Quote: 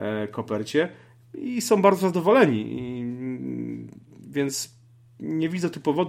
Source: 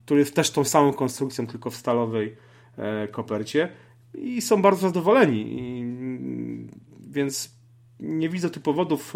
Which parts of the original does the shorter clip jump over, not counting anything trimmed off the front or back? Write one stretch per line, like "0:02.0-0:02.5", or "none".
none